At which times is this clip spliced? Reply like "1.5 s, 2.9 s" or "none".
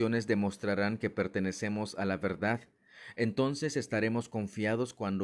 none

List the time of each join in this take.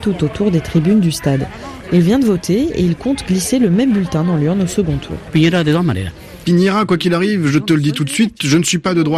1.9 s

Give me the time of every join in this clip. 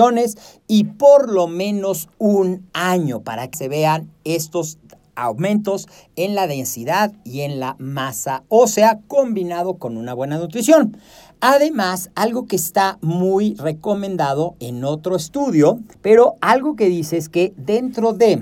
3.5 s, 15.9 s

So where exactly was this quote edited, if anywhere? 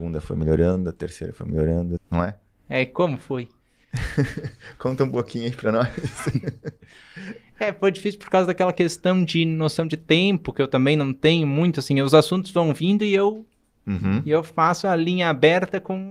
2.0 s

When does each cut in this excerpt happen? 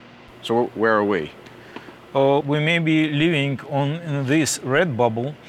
2.4 s

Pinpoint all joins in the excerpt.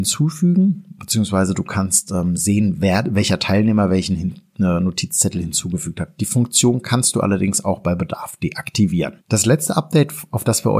9.2 s

